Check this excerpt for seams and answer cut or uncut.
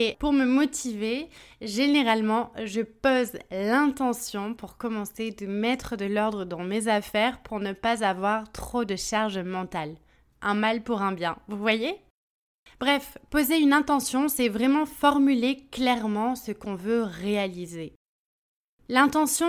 uncut